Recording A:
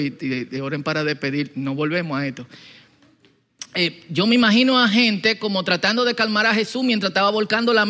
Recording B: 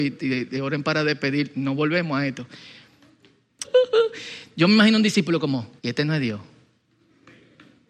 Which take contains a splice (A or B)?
B